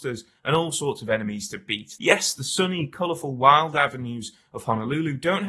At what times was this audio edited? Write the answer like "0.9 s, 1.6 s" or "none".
2.0 s